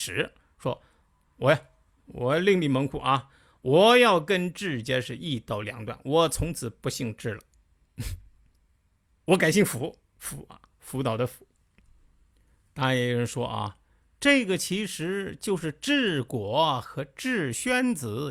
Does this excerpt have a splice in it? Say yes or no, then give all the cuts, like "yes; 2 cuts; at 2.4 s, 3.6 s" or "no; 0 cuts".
no; 0 cuts